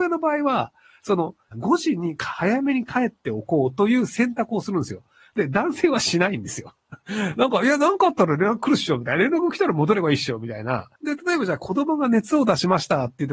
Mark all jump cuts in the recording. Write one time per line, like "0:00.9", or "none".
0:01.5
0:11.0